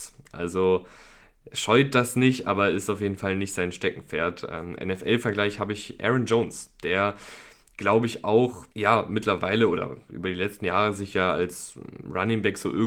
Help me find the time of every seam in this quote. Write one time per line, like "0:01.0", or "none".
0:08.7